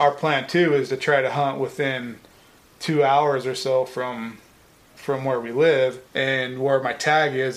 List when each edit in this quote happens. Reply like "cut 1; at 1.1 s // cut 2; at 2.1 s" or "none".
cut 1; at 6.1 s